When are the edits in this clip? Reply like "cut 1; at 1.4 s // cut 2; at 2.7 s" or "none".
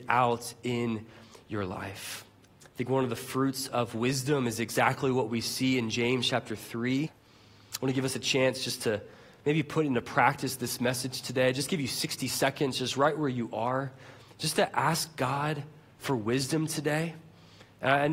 cut 1; at 7.1 s